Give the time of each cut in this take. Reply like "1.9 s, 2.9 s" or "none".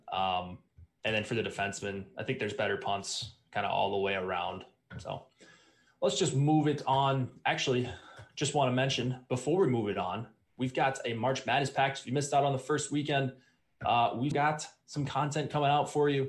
14.3 s

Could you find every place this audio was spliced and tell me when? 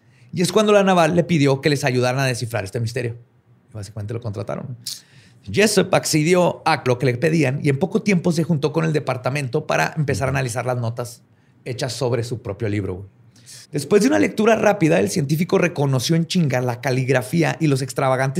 6.9 s, 13.6 s

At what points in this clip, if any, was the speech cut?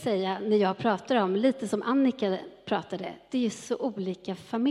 none

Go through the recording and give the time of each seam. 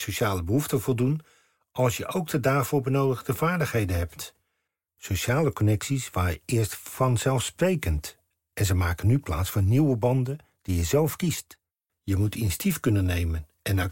4.9 s, 11.9 s

